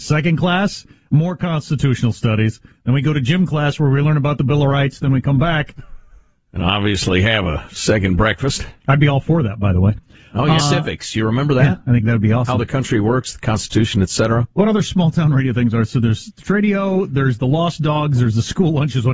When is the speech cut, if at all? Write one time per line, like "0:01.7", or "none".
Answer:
0:10.6